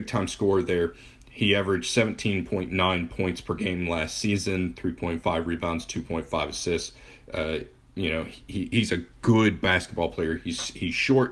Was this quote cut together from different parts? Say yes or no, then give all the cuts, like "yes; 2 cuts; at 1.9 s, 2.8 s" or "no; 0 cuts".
no; 0 cuts